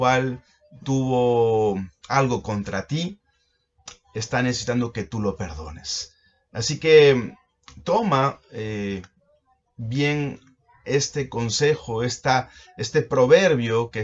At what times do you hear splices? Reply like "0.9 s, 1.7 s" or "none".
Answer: none